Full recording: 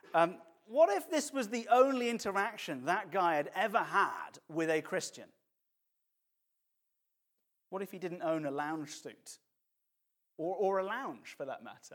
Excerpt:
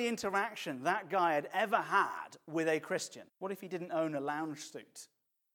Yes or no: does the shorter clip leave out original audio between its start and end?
yes